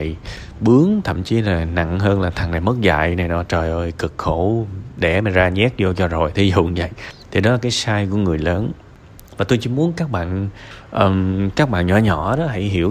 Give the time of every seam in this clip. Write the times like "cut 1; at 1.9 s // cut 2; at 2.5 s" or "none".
none